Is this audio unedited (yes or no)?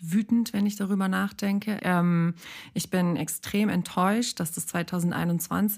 no